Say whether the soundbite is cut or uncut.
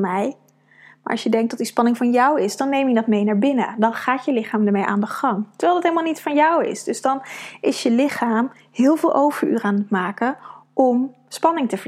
uncut